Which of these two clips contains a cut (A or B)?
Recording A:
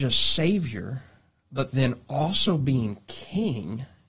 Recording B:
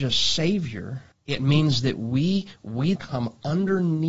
B